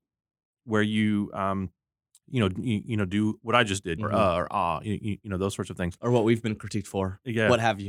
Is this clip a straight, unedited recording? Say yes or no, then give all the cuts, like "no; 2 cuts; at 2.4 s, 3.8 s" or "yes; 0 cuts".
no; 1 cut; at 4.0 s